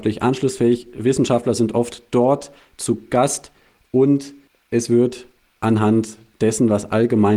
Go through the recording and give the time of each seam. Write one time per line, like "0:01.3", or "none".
none